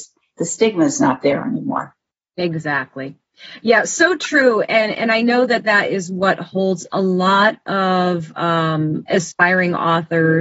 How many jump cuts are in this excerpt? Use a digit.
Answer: 0